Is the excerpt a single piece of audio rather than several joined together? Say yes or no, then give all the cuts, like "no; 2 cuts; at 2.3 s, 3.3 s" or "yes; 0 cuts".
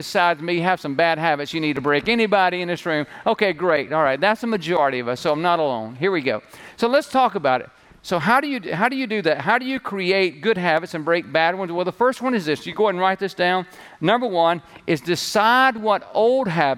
yes; 0 cuts